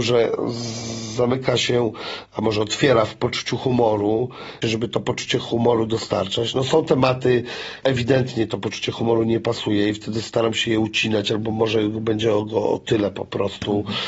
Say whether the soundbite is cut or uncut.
cut